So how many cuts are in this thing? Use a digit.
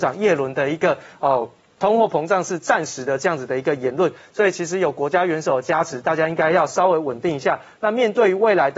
0